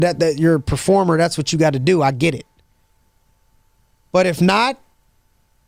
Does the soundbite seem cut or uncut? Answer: uncut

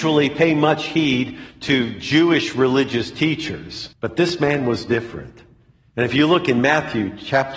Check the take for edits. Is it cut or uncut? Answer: cut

